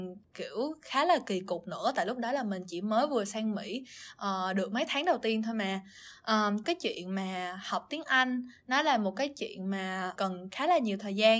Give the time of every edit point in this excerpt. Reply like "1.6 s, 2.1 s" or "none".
6.6 s, 10.2 s